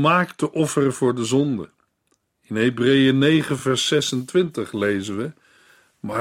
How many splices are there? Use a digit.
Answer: 0